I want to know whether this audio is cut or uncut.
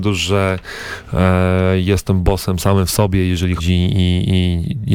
cut